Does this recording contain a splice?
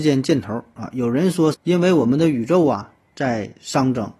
yes; 1 cut; at 1.5 s

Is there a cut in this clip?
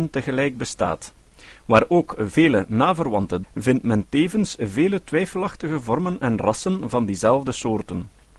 yes; 1 cut; at 3.4 s

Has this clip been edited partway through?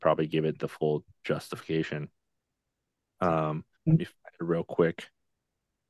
yes; 1 cut; at 3.7 s

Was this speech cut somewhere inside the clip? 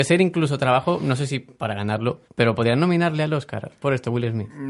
yes; 1 cut; at 2.3 s

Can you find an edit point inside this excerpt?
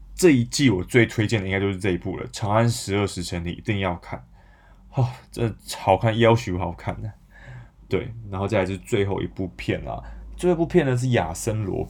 no; 0 cuts

